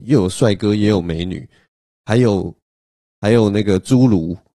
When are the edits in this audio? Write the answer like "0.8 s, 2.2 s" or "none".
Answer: none